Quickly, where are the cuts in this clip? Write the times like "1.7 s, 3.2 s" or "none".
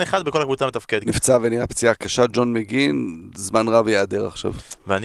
1.0 s